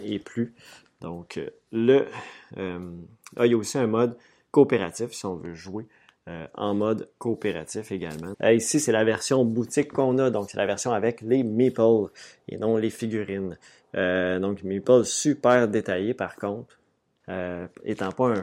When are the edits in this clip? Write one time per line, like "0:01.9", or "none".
0:08.3
0:17.2